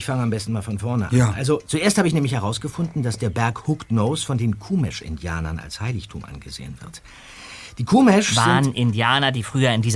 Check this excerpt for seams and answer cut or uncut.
uncut